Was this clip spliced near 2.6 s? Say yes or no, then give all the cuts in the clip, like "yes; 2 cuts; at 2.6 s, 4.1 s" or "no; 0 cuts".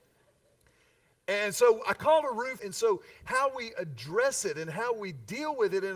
yes; 1 cut; at 2.6 s